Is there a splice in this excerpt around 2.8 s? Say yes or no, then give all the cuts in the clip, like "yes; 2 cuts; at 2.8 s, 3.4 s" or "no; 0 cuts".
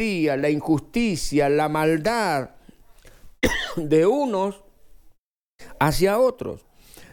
no; 0 cuts